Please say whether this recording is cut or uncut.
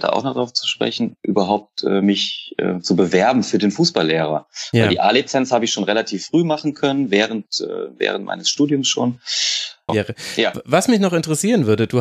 cut